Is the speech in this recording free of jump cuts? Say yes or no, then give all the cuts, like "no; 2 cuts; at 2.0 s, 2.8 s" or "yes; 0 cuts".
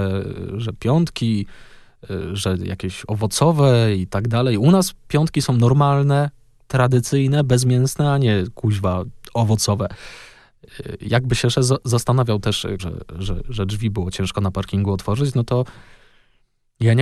no; 1 cut; at 12.8 s